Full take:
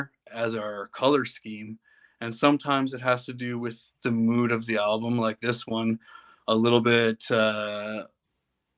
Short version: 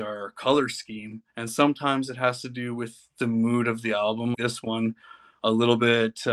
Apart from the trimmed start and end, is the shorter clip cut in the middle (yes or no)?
yes